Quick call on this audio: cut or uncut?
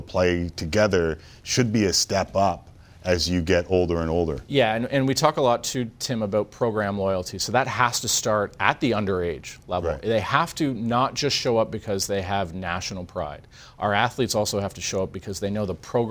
uncut